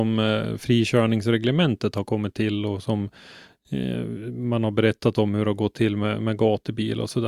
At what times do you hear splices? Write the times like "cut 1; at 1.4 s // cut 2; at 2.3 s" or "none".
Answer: none